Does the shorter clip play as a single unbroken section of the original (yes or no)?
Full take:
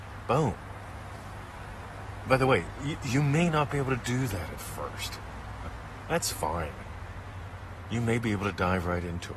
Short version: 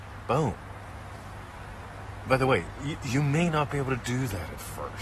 yes